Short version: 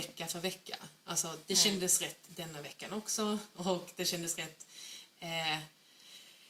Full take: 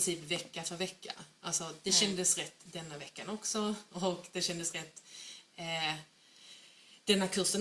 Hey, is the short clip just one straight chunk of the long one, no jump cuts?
yes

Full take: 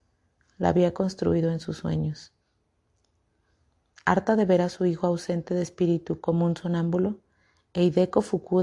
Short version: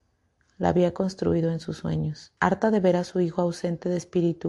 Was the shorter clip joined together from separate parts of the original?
yes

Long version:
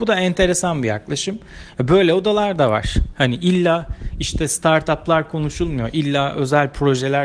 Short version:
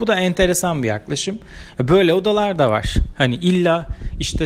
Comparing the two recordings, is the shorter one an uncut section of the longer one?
yes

